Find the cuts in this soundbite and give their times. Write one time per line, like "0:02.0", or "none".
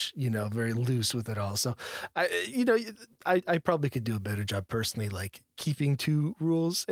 none